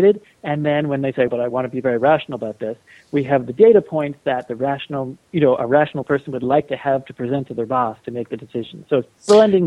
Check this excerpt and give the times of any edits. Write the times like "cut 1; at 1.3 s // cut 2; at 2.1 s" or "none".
cut 1; at 1.3 s